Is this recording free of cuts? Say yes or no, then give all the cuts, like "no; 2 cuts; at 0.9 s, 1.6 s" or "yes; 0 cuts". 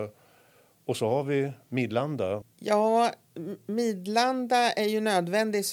no; 1 cut; at 2.4 s